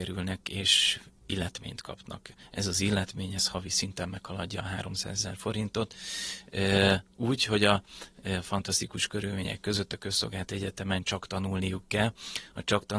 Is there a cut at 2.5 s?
no; 0 cuts

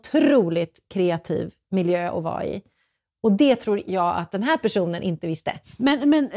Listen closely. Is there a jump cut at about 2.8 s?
no; 0 cuts

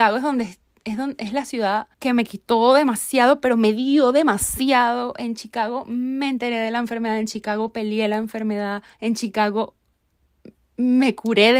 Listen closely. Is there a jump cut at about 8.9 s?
yes; 2 cuts; at 1.9 s, 8.9 s

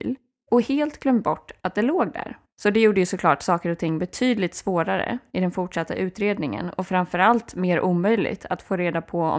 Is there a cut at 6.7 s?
no; 1 cut; at 2.5 s

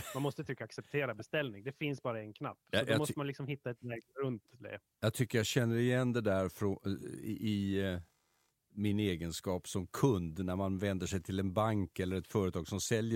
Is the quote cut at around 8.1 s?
no; 0 cuts

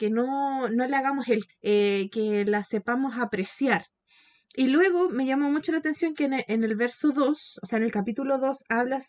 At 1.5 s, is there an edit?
yes; 1 cut; at 1.5 s

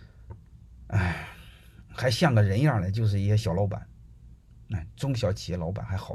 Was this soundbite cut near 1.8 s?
no; 0 cuts

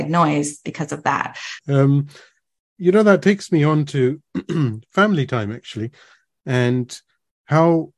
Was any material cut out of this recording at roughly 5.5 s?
no; 1 cut; at 1.6 s

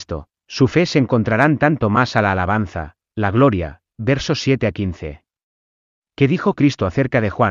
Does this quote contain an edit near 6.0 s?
no; 1 cut; at 3.1 s

